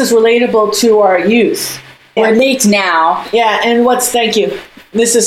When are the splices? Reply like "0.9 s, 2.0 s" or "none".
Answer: 2.2 s